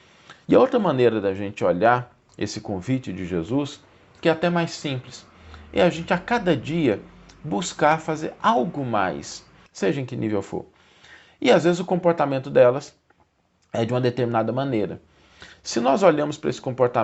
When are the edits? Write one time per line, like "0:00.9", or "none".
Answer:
0:09.7